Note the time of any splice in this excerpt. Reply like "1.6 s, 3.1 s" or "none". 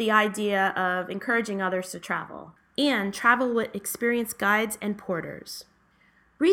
2.6 s